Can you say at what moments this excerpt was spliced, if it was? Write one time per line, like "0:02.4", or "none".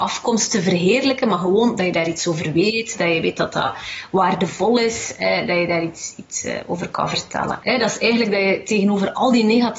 0:07.6